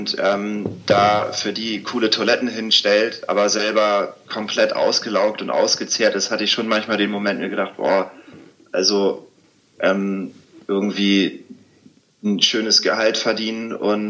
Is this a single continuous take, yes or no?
yes